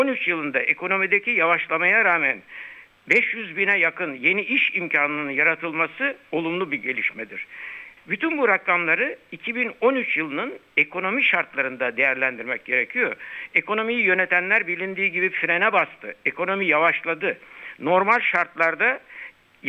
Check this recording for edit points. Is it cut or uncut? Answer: cut